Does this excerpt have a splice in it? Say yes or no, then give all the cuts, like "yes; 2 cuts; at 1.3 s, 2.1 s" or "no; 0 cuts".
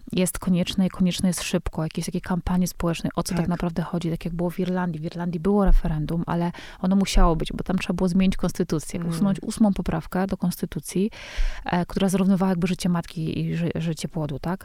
no; 0 cuts